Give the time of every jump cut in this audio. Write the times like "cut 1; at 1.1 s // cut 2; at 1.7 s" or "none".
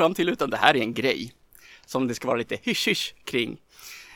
none